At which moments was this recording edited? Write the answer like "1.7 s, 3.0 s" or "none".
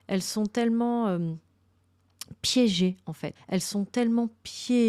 3.4 s